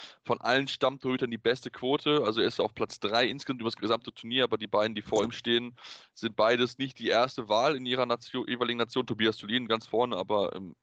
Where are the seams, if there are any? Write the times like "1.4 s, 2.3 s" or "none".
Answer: none